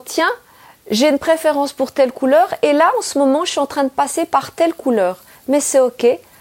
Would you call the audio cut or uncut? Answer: uncut